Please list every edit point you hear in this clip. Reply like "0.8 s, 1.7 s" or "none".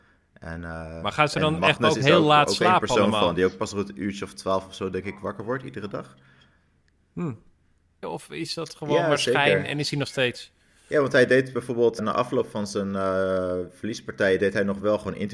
8.0 s, 12.0 s